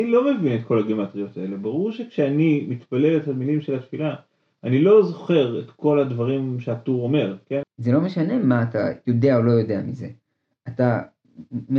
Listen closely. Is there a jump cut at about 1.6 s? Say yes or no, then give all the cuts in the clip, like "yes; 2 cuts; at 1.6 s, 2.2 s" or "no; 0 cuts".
no; 1 cut; at 7.6 s